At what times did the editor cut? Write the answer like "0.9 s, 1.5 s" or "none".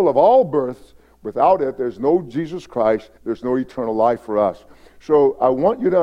3.2 s